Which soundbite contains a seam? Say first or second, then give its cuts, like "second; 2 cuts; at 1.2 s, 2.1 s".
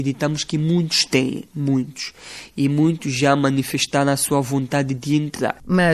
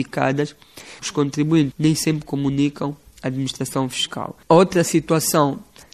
second; 2 cuts; at 1.7 s, 4.4 s